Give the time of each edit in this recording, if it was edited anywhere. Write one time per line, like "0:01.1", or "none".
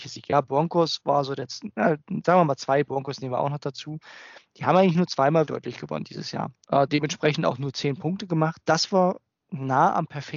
0:05.5
0:06.6